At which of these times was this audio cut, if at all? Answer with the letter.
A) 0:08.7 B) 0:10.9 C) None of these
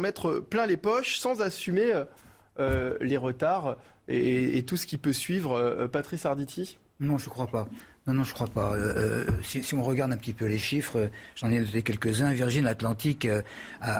C